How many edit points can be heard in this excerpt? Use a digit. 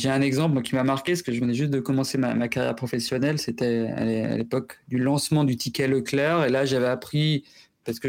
0